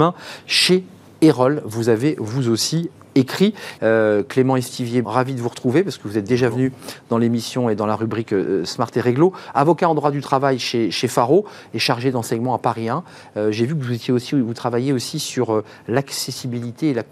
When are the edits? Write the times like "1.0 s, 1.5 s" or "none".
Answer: 3.8 s, 5.0 s